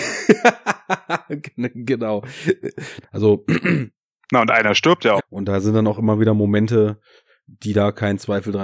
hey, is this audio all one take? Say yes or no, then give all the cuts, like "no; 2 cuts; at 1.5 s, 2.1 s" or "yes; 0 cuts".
no; 2 cuts; at 3.0 s, 5.2 s